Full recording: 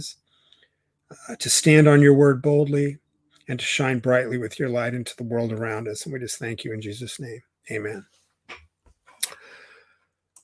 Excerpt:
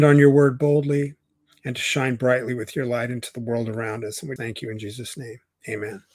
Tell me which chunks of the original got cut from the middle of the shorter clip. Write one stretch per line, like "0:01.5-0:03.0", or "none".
0:06.2-0:06.4